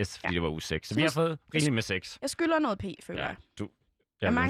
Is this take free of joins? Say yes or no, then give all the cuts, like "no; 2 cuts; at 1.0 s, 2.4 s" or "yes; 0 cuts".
yes; 0 cuts